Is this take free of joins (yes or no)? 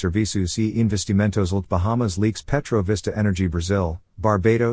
no